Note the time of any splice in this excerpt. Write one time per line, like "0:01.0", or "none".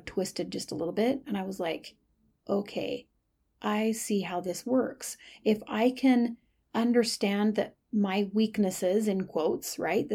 none